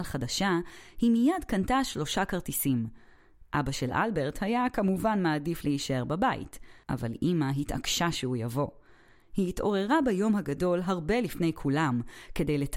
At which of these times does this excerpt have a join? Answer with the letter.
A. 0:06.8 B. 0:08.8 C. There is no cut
A